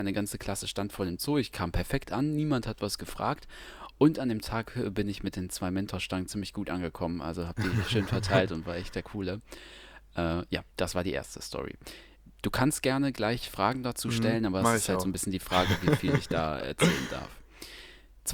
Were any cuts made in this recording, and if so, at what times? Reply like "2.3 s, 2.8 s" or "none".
10.7 s